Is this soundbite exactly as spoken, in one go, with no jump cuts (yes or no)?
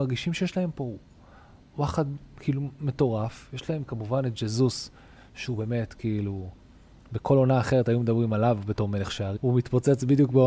no